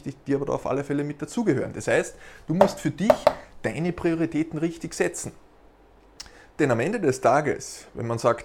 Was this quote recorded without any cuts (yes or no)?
yes